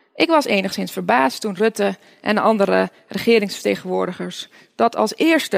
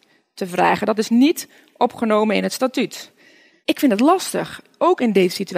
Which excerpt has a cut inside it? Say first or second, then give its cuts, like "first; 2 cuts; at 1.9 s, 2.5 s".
second; 1 cut; at 3.5 s